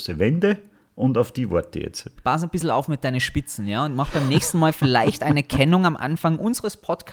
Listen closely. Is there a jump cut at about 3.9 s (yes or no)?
no